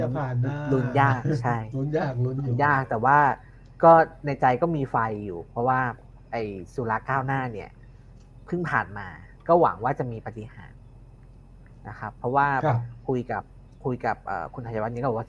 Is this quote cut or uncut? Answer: uncut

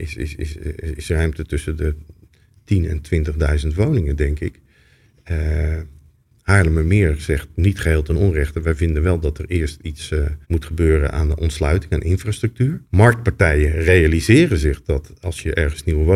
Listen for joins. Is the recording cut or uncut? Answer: cut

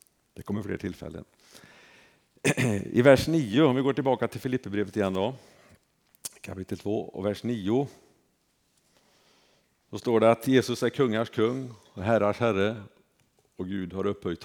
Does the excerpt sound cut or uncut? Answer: uncut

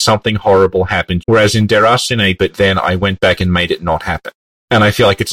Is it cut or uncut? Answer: cut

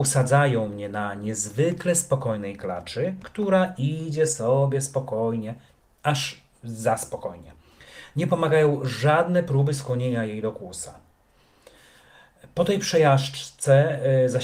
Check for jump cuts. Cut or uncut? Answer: uncut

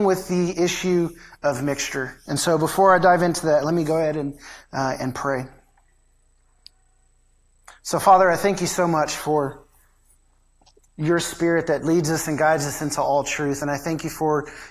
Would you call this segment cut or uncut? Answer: uncut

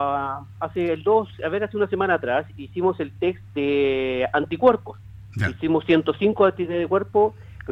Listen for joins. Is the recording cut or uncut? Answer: uncut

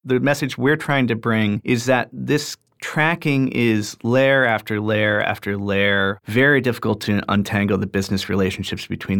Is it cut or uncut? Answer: cut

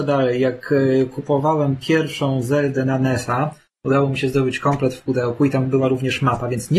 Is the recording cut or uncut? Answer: uncut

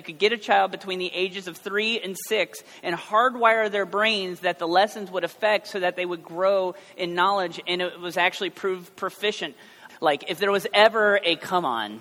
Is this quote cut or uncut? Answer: cut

